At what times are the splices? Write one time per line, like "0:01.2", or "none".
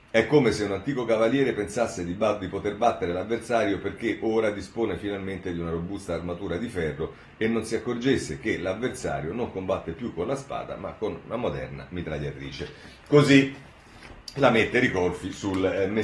none